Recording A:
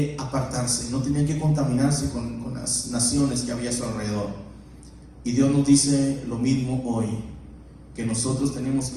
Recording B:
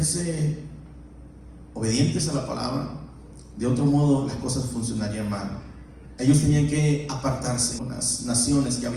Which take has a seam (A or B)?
B